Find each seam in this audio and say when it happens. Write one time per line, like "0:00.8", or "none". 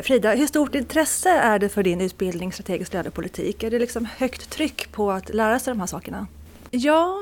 none